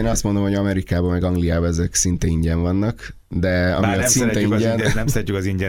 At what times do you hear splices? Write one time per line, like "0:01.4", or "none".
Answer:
none